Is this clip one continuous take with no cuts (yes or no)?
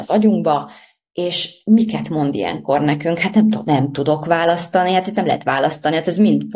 yes